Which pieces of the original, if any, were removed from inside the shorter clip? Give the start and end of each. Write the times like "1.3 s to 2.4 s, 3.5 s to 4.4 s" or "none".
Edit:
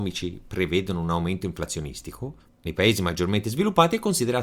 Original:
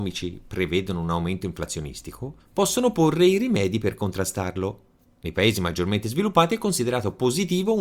2.5 s to 5.1 s